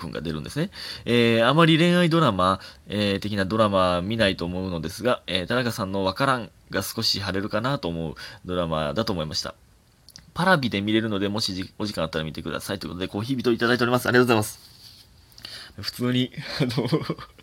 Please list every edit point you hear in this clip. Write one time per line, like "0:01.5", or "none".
0:15.7